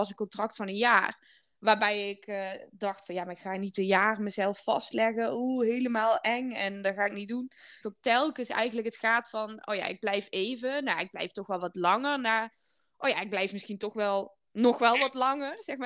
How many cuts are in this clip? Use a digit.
1